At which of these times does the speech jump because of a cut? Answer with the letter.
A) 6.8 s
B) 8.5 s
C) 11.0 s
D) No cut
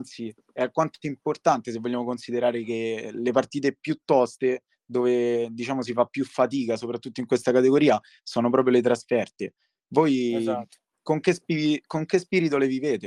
D